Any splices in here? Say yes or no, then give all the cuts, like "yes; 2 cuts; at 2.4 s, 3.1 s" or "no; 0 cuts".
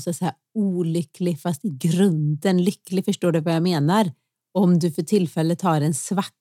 no; 0 cuts